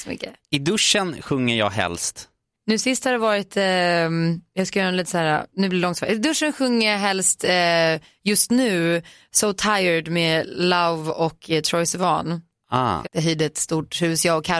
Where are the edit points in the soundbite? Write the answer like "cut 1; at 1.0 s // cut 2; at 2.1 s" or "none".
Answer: cut 1; at 13.0 s